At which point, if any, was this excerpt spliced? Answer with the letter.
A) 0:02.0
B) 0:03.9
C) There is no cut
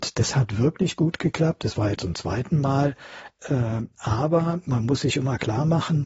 A